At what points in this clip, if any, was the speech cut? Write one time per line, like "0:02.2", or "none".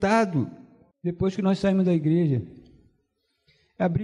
0:00.9